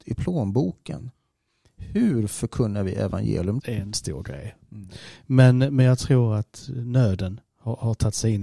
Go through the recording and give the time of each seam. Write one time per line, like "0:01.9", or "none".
0:03.6